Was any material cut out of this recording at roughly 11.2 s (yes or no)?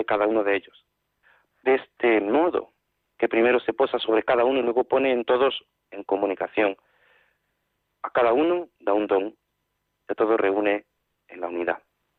no